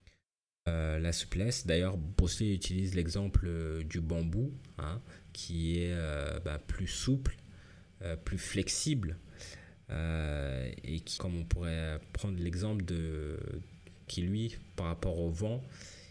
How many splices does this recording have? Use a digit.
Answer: 2